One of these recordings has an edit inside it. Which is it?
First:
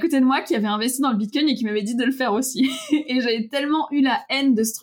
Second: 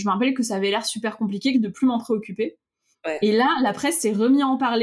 second; 2 cuts; at 1.5 s, 2.9 s

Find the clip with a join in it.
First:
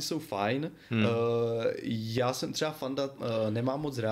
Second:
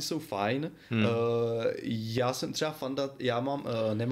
first; 1 cut; at 3.2 s

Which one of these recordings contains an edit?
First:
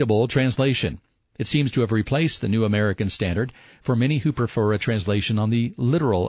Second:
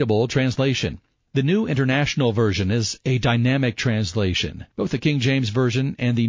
second; 2 cuts; at 1.1 s, 4.7 s

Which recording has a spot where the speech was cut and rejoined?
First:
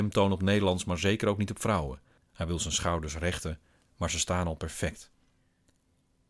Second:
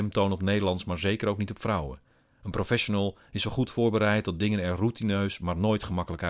first; 1 cut; at 2.2 s

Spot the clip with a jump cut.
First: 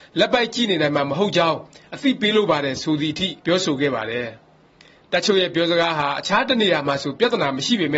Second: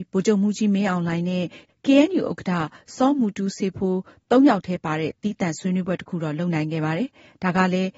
first; 1 cut; at 3.4 s

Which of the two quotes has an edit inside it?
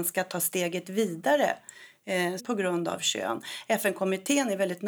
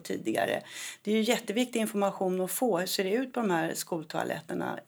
first; 1 cut; at 2.4 s

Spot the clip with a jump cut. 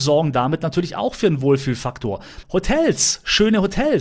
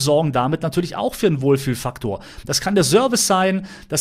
first; 1 cut; at 2.4 s

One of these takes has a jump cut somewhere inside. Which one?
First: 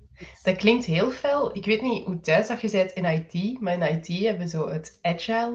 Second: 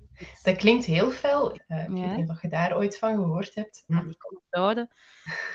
second; 2 cuts; at 1.5 s, 3.9 s

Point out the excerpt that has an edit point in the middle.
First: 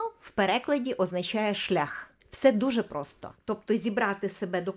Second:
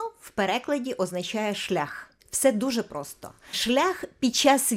first; 1 cut; at 3.3 s

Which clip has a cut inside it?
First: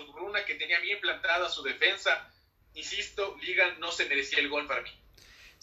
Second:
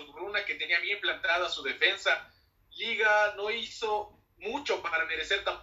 first; 1 cut; at 2.6 s

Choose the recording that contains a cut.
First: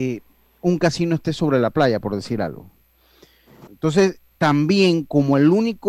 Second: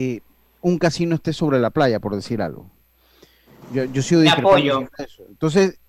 first; 1 cut; at 3.7 s

